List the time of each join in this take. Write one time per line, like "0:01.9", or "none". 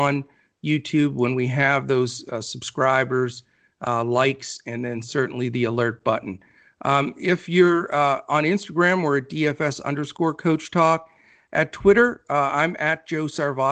none